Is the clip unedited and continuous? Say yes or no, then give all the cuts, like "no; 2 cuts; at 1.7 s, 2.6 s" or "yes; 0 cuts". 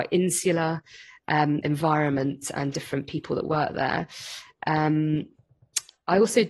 no; 2 cuts; at 1.6 s, 2.7 s